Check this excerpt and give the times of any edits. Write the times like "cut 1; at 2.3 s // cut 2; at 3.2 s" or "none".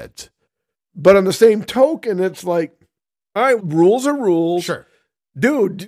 cut 1; at 3.6 s